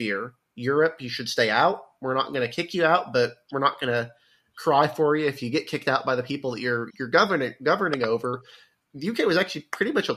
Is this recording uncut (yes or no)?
no